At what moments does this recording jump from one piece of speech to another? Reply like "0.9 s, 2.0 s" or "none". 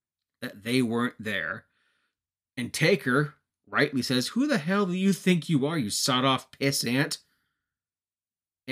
none